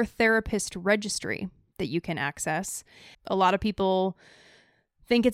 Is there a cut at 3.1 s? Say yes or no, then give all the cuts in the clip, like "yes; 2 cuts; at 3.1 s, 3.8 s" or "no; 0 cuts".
yes; 1 cut; at 3.1 s